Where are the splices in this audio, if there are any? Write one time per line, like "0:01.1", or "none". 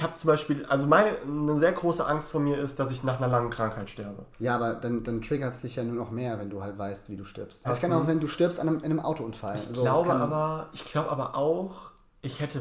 0:04.3
0:07.6